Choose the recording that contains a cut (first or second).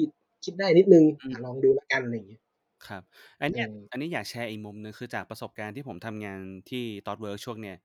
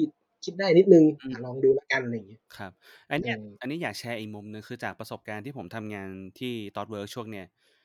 second